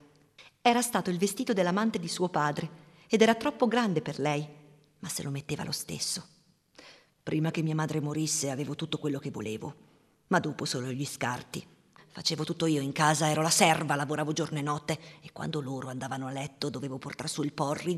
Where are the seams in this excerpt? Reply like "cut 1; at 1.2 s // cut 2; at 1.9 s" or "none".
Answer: cut 1; at 12.0 s